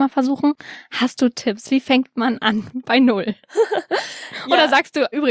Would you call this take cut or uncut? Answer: uncut